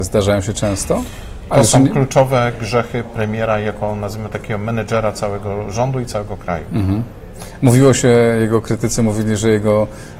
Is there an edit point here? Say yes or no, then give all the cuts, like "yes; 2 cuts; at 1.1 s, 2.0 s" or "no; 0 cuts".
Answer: yes; 1 cut; at 1.5 s